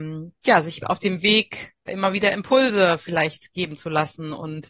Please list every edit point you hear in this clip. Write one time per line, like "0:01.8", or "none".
0:01.9